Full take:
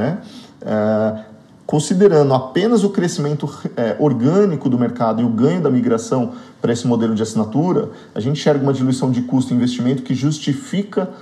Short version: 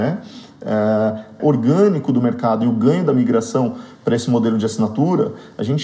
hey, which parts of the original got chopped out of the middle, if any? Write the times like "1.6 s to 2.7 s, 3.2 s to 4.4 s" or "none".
1.4 s to 4.0 s